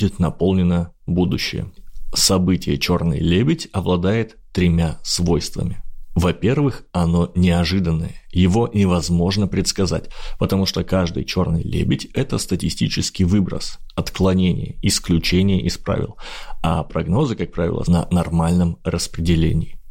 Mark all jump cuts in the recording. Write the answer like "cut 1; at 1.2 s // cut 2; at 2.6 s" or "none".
cut 1; at 17.8 s